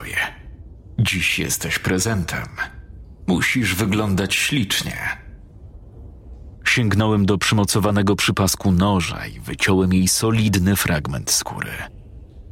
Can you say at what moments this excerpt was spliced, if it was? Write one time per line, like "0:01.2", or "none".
0:06.5

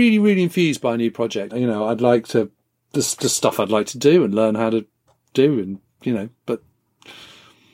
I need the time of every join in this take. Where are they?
0:01.5

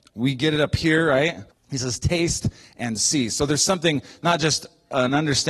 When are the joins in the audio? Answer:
0:01.5

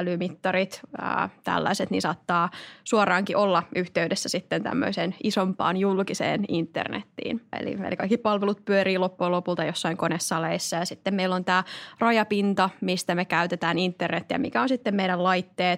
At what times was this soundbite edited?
0:07.5

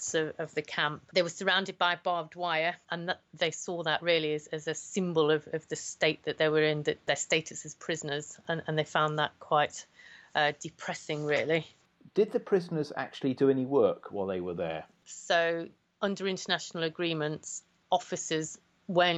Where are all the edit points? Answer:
0:15.0

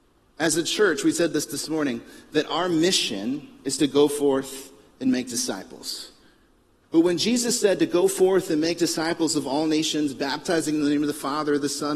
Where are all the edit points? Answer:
0:06.8

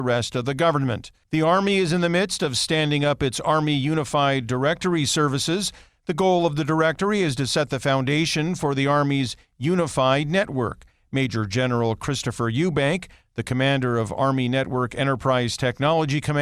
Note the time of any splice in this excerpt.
0:01.2

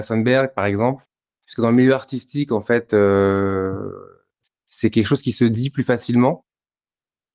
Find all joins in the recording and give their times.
0:01.4

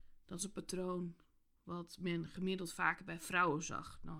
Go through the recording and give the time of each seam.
none

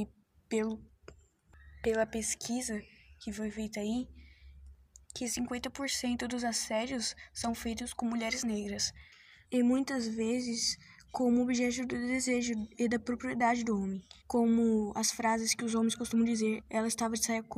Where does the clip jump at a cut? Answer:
0:09.4
0:14.2
0:16.6

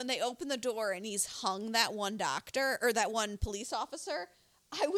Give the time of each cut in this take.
none

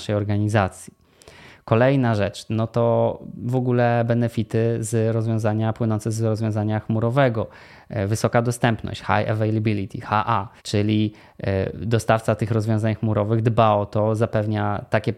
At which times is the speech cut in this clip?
0:10.6

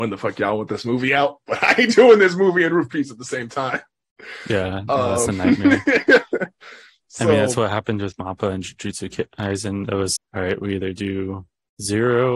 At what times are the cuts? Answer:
0:10.2

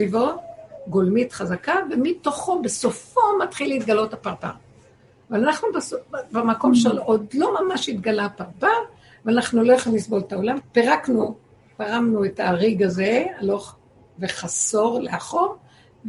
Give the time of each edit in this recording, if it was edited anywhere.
0:10.6

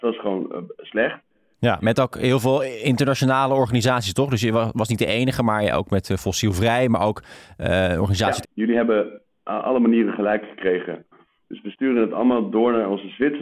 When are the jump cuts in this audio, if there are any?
0:01.5
0:08.4
0:11.4

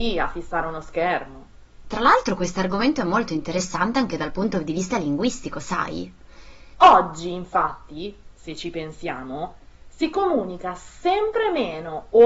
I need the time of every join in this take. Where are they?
0:01.8
0:06.7

